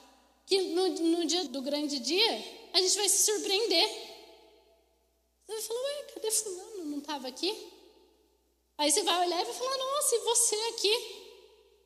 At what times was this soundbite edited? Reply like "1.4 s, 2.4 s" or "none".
1.5 s

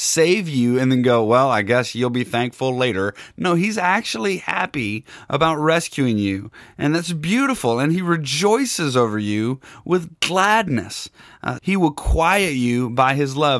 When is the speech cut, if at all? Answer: 11.6 s

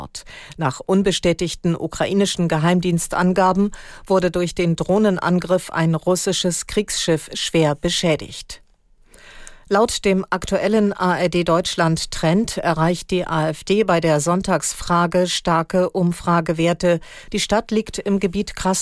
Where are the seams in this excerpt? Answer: 17.3 s

